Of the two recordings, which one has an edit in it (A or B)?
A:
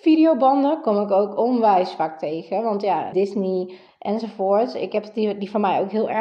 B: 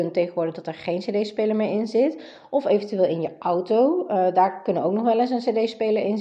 A